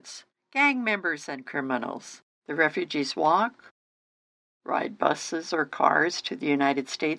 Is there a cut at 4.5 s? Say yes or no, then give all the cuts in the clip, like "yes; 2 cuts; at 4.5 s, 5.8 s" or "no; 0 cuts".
no; 1 cut; at 2.3 s